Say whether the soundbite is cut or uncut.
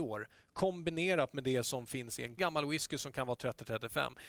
cut